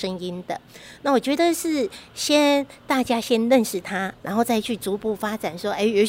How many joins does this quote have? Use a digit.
1